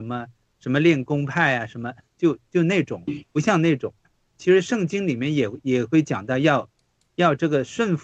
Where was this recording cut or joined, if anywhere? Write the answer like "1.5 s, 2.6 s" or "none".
4.3 s